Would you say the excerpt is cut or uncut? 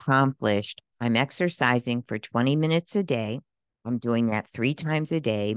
uncut